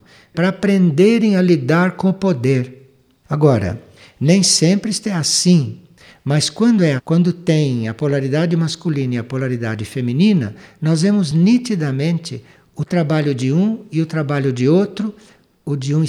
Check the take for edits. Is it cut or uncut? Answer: cut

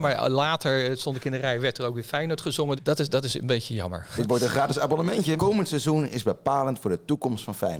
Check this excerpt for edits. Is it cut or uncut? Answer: cut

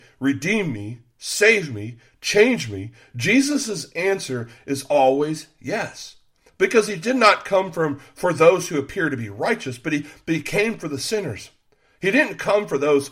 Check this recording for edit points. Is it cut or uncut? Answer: uncut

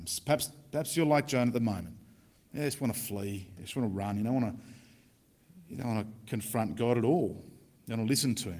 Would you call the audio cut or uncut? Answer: uncut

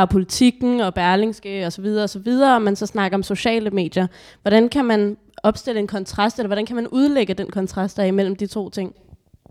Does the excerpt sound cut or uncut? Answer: uncut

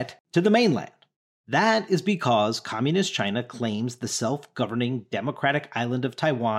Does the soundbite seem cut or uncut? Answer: uncut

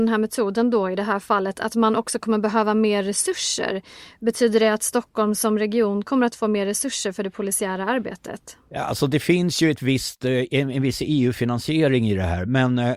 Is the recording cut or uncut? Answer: uncut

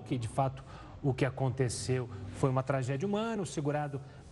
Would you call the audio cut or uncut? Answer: uncut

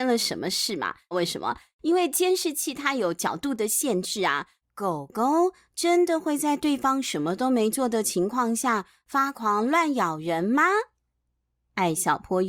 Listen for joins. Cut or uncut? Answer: cut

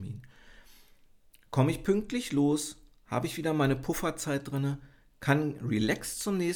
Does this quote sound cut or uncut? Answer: uncut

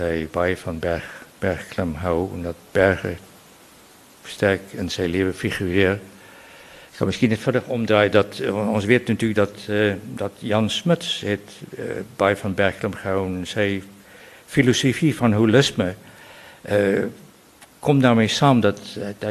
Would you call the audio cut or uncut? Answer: uncut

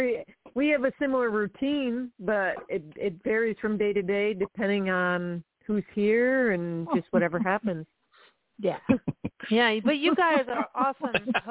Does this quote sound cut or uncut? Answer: uncut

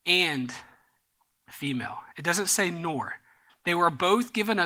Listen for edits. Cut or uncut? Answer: cut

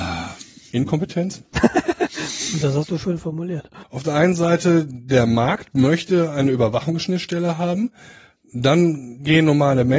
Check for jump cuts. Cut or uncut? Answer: cut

